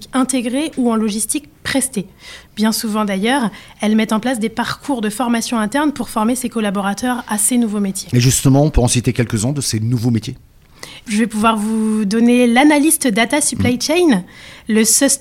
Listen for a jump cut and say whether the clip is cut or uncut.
cut